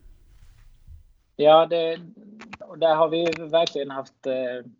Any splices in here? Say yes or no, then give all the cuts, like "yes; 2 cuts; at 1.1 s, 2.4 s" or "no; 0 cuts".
no; 0 cuts